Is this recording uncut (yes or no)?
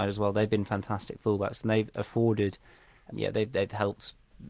no